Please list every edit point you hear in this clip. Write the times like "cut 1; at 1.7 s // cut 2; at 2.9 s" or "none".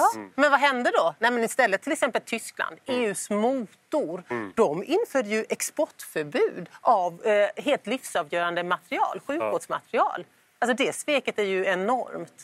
none